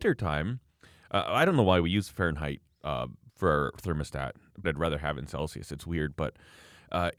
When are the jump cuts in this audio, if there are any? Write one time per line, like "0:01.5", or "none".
0:04.6

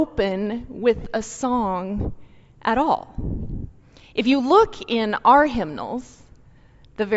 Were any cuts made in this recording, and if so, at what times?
none

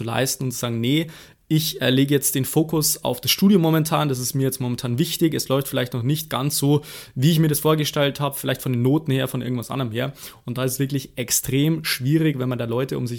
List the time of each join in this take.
none

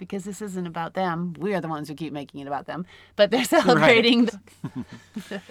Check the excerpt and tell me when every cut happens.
0:04.3

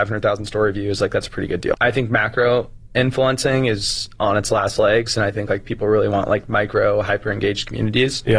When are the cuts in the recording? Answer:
0:01.7

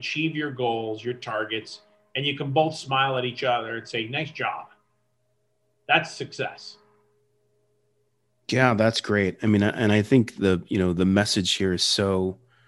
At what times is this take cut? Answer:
none

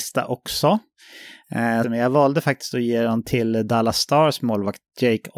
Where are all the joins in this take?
0:01.8

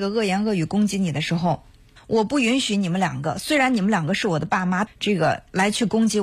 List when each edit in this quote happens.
0:02.0
0:04.9

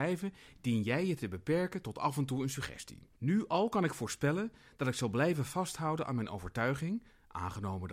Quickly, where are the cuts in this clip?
0:03.2

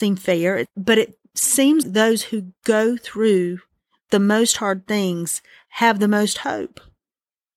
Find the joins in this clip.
0:01.8

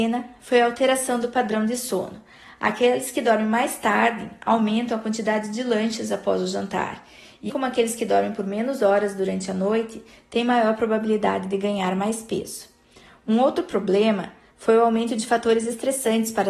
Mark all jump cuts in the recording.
0:07.5

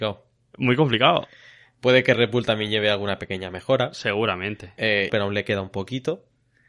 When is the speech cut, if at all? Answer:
0:05.1

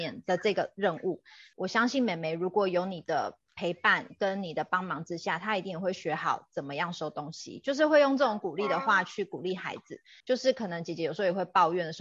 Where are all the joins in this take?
0:01.5
0:10.2

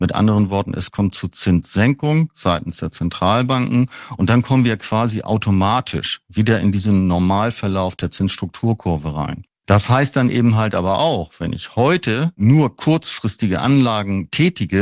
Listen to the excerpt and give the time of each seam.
none

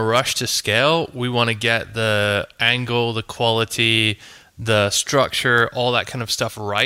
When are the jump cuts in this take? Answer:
none

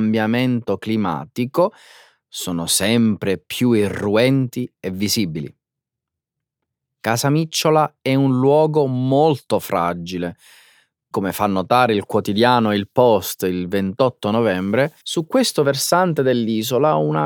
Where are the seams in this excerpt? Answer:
0:11.1
0:15.0

